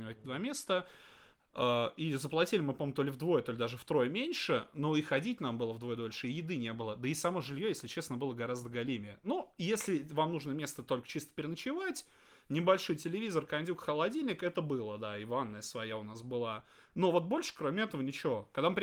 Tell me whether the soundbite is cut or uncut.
uncut